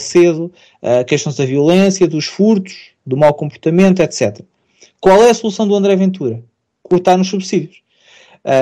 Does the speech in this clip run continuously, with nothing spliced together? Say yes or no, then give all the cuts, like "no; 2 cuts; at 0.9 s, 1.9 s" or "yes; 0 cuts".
yes; 0 cuts